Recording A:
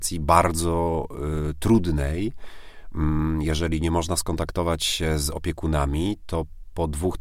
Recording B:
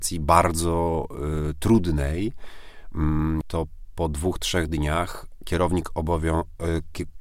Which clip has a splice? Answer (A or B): B